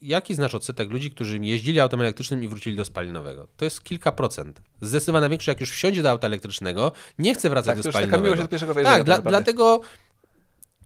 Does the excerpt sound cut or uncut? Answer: uncut